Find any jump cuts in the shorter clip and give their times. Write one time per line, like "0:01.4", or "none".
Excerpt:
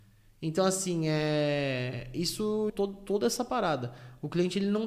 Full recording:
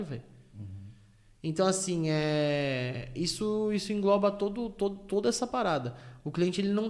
0:02.7